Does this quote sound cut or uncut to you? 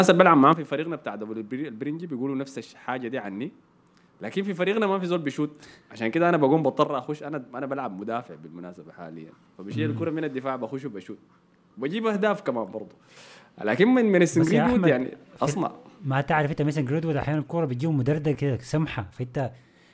cut